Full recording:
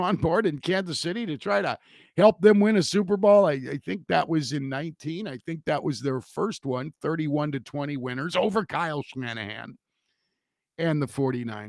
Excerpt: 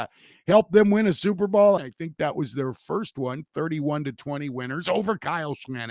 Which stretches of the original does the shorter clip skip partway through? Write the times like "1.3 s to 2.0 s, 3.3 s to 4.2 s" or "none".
3.5 s to 5.2 s